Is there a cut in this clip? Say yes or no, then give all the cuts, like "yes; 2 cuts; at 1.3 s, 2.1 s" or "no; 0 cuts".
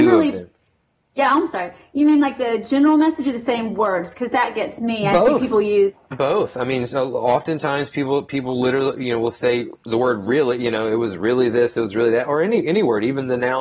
no; 0 cuts